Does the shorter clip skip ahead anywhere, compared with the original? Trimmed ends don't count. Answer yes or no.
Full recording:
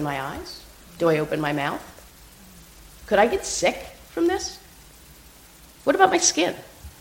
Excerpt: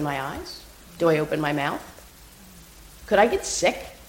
no